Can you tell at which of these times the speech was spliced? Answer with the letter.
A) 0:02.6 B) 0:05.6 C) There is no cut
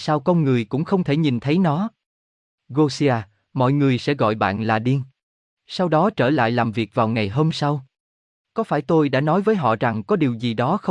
B